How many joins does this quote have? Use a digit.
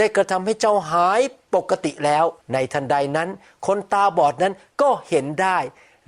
1